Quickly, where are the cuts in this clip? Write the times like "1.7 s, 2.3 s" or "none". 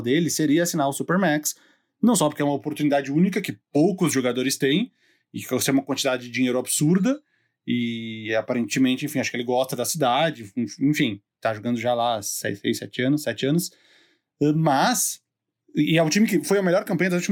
none